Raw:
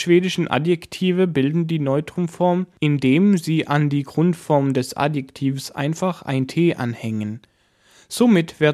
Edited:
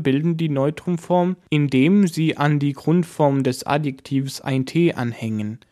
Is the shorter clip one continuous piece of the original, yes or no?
no